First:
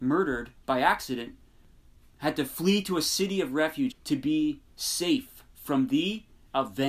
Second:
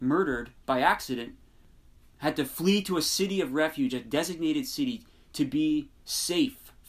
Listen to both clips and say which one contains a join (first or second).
first